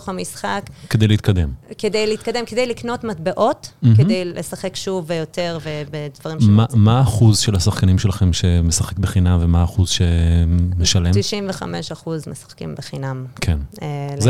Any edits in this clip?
no; 0 cuts

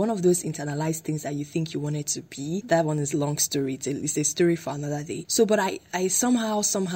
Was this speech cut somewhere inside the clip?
no; 0 cuts

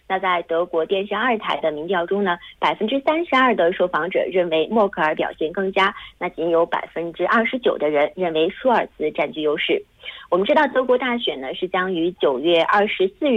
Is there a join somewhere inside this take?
no; 0 cuts

